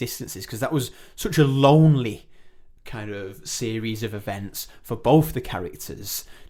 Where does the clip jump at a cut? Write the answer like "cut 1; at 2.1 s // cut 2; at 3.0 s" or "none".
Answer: cut 1; at 2.8 s